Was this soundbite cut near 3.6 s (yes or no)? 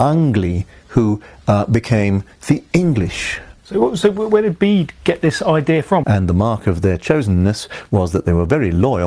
yes